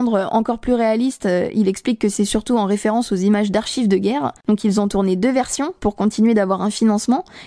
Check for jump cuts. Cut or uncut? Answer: uncut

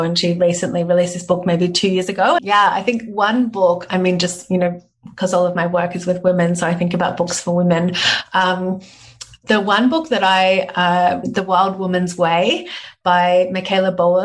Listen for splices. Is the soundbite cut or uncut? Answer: cut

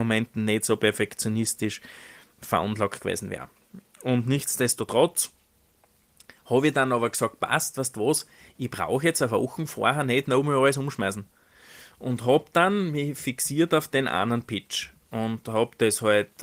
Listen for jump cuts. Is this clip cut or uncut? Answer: cut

